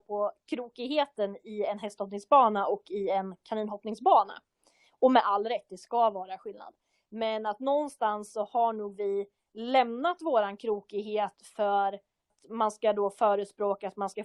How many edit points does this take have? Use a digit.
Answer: 0